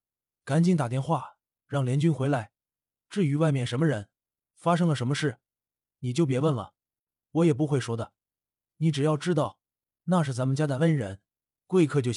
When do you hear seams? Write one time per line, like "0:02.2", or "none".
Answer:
none